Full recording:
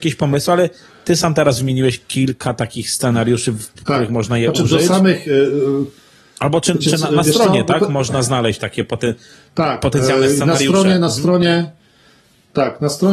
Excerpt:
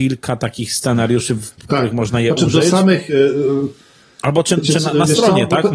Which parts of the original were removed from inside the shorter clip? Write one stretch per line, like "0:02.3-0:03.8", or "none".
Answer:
none